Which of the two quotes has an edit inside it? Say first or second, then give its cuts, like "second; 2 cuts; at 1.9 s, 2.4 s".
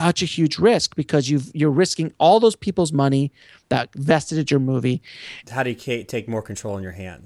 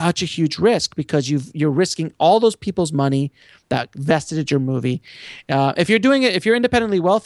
first; 1 cut; at 5.4 s